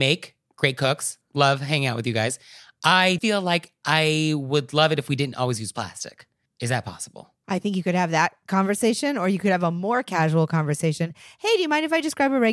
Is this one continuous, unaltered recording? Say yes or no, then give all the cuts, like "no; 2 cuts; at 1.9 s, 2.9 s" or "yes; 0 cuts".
no; 1 cut; at 3.2 s